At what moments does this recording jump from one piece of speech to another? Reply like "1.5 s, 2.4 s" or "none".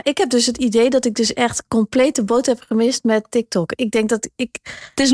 none

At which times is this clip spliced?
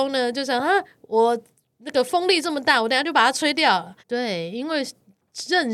4.0 s

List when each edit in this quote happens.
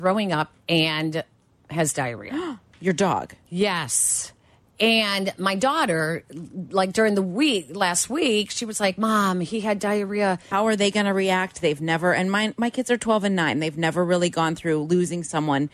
10.5 s

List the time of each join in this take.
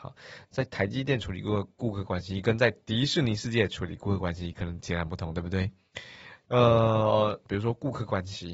6.4 s, 7.5 s

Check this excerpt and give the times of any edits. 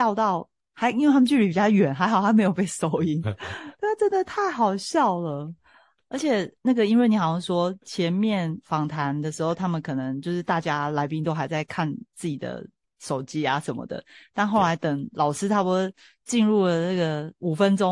6.6 s

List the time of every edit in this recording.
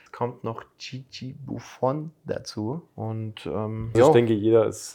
2.9 s, 3.9 s

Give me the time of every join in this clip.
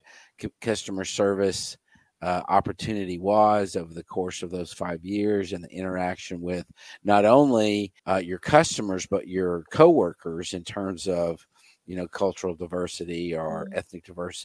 8.0 s

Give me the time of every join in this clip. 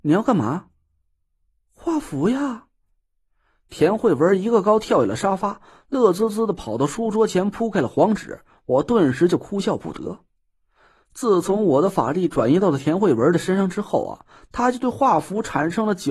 none

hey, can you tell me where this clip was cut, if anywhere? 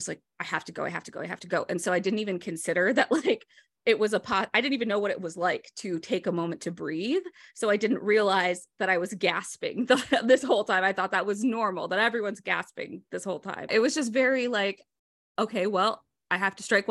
13.7 s

